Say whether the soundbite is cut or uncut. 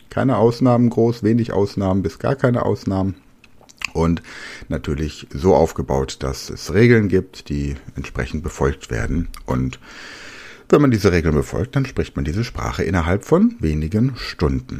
uncut